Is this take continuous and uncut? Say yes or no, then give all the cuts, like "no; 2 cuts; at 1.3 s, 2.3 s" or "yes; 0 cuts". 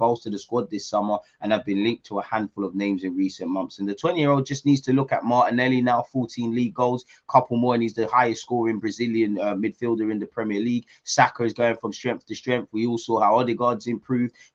yes; 0 cuts